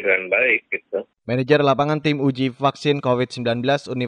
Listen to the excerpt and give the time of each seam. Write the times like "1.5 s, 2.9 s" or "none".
none